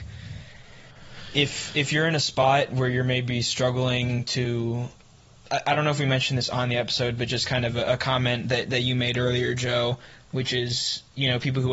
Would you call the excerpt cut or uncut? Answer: uncut